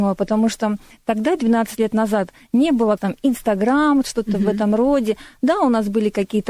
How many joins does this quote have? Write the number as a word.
one